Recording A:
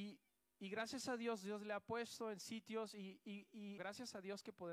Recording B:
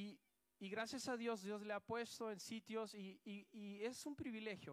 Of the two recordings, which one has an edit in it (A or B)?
A